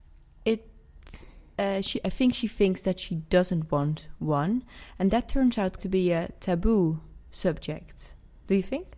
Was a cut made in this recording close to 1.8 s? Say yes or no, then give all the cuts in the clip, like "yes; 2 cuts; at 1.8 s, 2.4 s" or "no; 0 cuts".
no; 1 cut; at 5.8 s